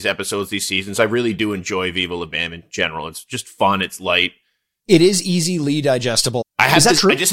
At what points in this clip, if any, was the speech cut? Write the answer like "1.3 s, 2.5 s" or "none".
4.8 s, 6.4 s

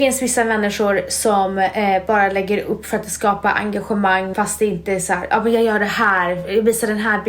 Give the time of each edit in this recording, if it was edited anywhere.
4.3 s

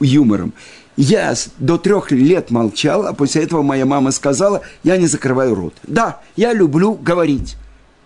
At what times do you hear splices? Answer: none

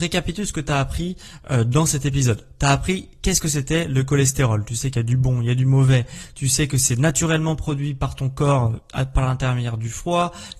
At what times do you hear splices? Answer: none

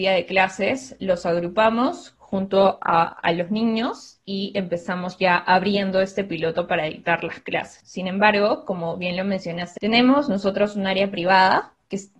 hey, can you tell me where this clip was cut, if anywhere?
7.8 s, 9.8 s

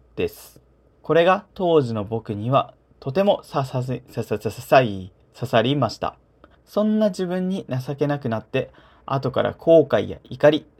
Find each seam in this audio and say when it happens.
0.9 s, 6.5 s

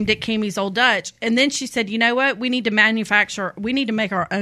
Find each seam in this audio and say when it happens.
none

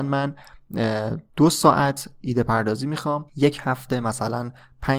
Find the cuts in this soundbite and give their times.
1.3 s, 3.3 s

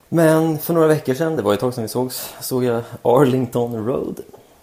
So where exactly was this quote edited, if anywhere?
none

